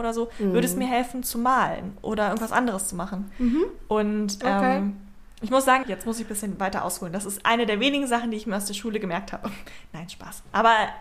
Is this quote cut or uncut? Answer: cut